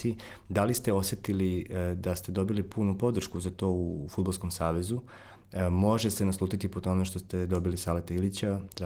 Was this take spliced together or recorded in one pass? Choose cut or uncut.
uncut